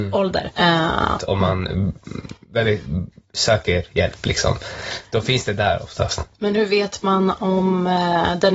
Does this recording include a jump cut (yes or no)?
yes